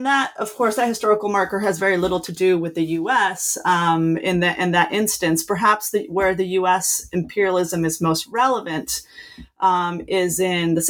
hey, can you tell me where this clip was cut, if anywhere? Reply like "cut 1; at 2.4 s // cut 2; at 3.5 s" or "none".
none